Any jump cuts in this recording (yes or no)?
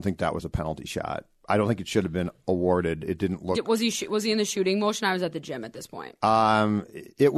no